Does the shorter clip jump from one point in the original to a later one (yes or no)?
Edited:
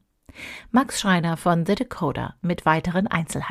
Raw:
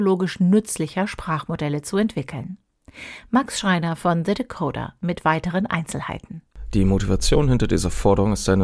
no